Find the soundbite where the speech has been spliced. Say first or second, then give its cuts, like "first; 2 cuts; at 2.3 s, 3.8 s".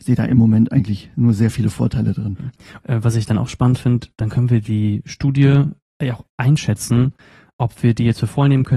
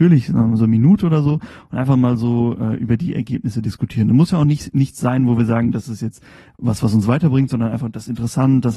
first; 1 cut; at 2.8 s